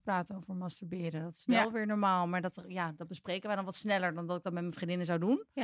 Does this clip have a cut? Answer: no; 0 cuts

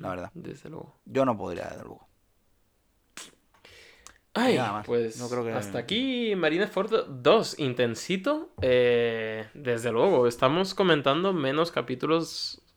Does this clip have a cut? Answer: no; 0 cuts

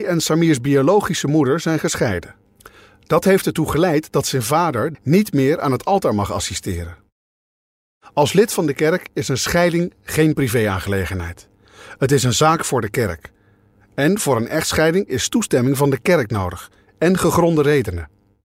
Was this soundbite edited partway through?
yes; 1 cut; at 4.9 s

